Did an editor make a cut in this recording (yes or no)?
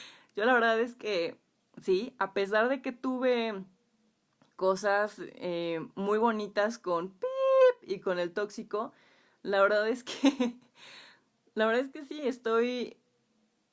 no